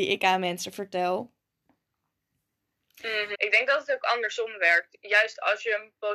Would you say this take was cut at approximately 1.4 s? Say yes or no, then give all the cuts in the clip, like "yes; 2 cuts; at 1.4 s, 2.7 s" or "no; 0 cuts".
no; 1 cut; at 3.3 s